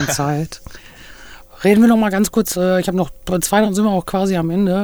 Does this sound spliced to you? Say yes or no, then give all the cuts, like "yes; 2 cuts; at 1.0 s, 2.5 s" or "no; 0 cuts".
yes; 1 cut; at 3.7 s